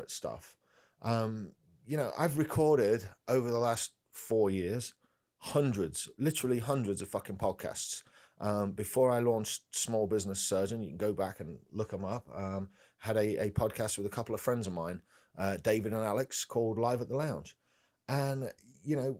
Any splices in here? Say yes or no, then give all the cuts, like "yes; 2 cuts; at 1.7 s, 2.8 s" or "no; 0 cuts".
no; 0 cuts